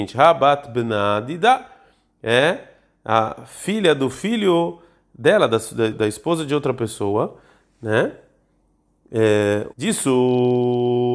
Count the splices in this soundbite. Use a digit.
2